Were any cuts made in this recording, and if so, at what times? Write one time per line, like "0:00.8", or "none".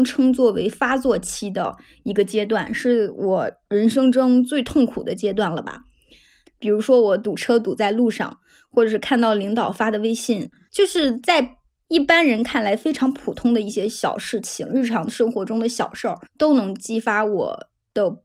0:06.5
0:10.7
0:16.3

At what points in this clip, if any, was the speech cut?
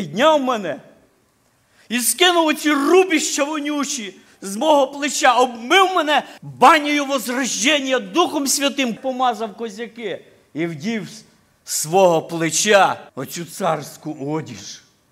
0:06.4
0:09.0
0:13.1

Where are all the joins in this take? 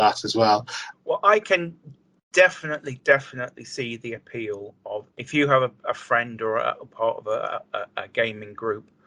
0:00.9
0:05.1

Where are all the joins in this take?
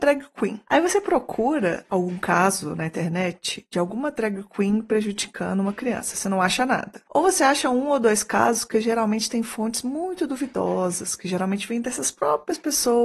0:07.1

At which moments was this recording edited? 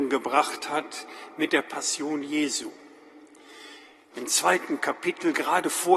0:04.1

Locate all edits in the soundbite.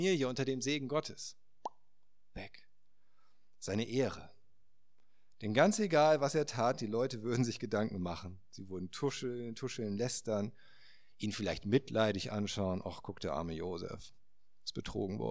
none

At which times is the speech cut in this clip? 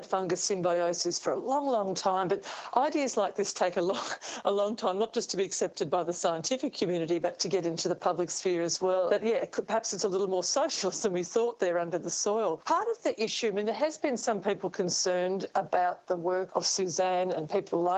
0:09.1
0:12.6
0:16.5

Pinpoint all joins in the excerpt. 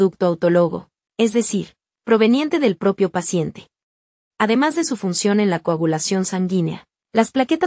0:04.3

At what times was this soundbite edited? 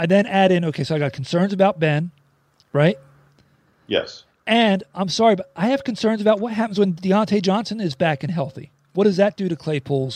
none

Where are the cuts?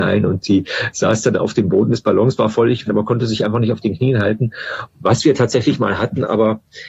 0:02.9
0:04.9

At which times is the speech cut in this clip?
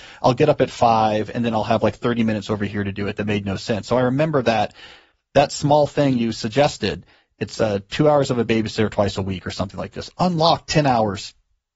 none

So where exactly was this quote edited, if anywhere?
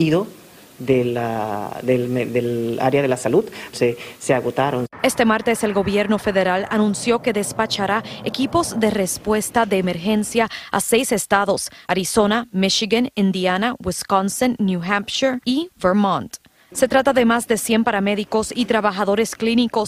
0:03.7

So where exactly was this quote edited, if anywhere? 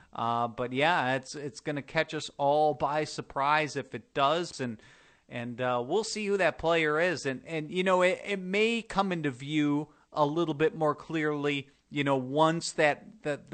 0:04.5

